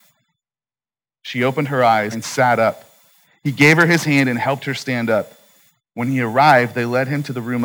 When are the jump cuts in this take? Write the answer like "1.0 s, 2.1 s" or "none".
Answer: 2.1 s, 5.8 s